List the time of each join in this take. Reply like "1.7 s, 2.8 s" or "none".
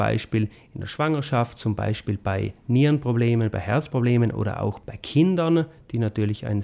none